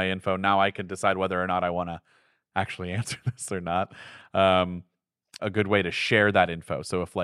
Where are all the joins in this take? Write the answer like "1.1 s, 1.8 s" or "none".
5.4 s